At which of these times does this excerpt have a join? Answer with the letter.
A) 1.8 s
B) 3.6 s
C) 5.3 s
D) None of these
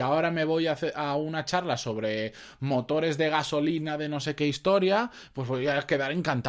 D